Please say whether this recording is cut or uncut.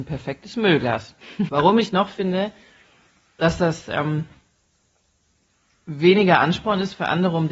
cut